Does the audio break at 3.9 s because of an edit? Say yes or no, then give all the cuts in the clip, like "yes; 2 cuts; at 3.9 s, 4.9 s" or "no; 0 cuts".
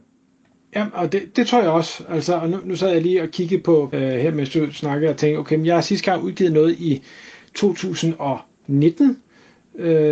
yes; 2 cuts; at 1.3 s, 3.9 s